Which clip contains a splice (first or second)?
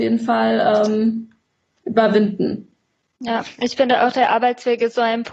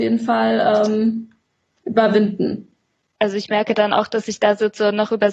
second